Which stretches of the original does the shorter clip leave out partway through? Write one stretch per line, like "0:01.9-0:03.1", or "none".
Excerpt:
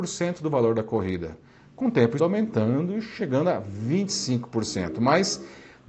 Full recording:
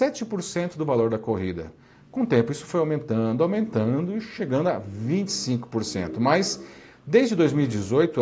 0:02.5-0:03.4